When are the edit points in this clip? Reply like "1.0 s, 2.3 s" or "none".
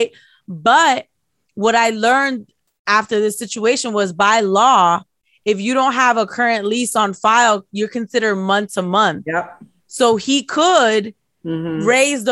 none

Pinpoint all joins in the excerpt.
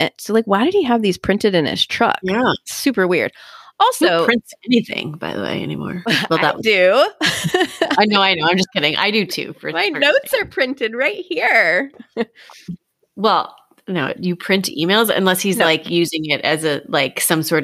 14.1 s

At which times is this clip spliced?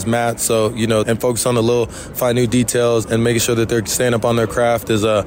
1.0 s, 3.0 s

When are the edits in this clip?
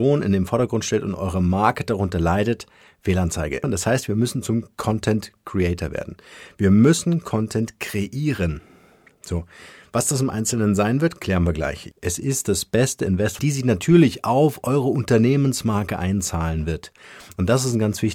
3.6 s, 11.9 s, 13.4 s

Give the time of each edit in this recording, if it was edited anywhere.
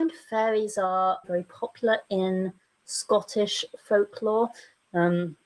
1.2 s

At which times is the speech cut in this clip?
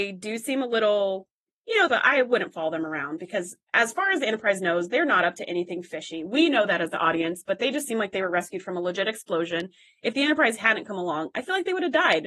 1.9 s

